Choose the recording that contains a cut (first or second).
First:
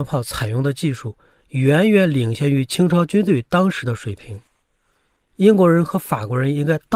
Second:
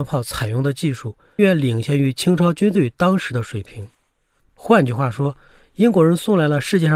second